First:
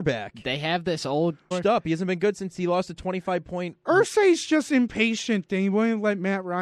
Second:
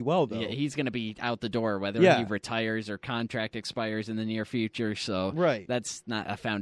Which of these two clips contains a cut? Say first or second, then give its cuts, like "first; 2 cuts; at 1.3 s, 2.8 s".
first; 1 cut; at 1.5 s